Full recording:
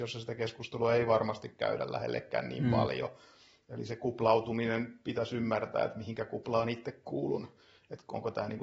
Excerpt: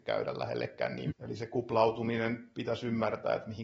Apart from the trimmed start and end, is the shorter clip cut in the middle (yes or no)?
yes